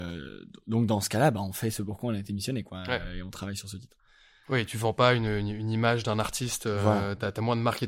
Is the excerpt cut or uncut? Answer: cut